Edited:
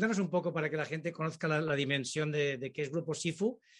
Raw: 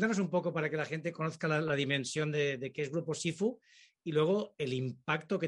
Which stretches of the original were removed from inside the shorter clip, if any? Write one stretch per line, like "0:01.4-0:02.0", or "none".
none